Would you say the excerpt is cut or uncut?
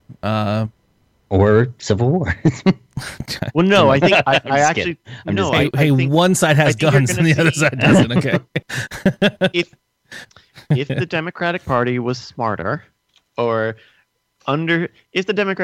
uncut